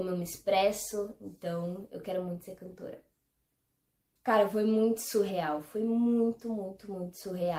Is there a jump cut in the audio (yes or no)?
yes